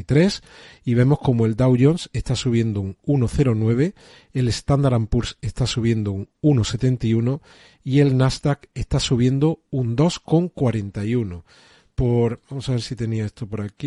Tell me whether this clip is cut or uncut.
uncut